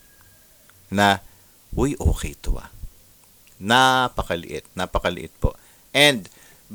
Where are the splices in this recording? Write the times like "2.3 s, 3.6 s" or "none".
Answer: 4.7 s